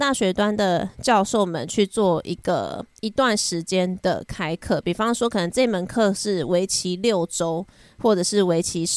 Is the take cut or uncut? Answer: uncut